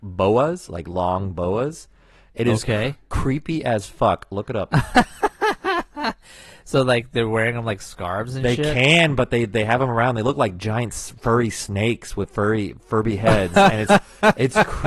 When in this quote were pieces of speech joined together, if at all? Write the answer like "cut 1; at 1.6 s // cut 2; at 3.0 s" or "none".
none